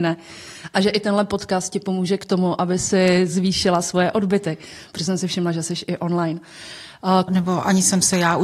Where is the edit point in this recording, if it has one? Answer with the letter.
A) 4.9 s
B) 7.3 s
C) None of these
B